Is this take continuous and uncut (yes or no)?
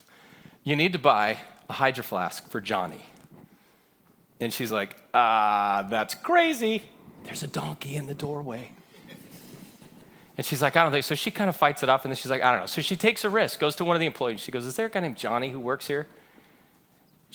yes